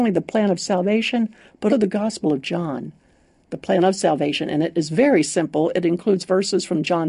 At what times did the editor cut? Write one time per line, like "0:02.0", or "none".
0:01.7